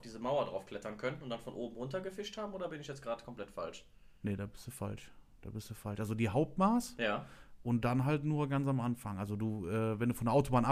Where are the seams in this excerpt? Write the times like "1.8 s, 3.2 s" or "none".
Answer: none